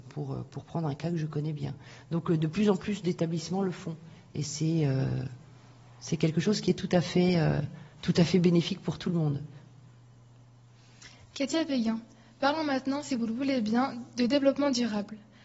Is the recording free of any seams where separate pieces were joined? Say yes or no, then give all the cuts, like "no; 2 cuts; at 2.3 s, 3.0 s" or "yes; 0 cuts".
yes; 0 cuts